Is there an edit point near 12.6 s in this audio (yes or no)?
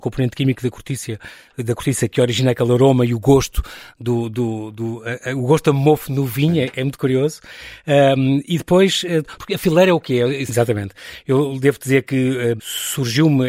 yes